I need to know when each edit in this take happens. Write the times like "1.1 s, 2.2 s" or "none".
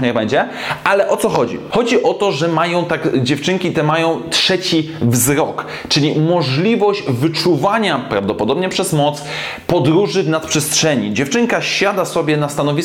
1.7 s